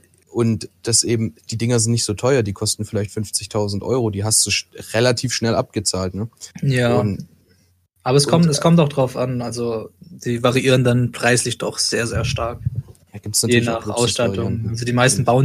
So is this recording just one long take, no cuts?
yes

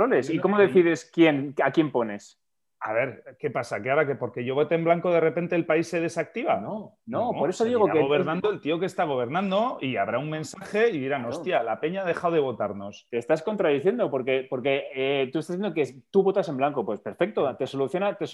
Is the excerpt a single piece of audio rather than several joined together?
yes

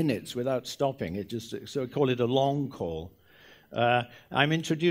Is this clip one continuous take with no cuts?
yes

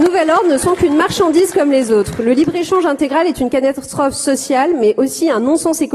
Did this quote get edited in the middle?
no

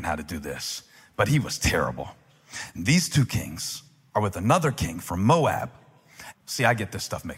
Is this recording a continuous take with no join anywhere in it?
no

